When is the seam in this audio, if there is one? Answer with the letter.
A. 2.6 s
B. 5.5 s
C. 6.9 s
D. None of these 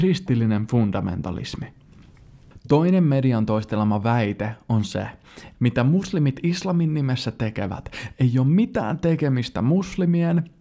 B